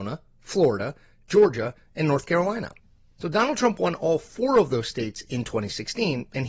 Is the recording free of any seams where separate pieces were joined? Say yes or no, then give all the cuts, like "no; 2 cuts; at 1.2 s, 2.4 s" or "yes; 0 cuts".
yes; 0 cuts